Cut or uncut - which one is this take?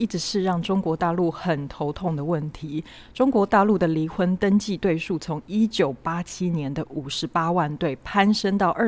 uncut